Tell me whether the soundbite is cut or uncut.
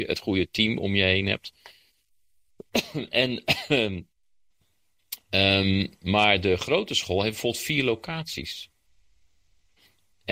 uncut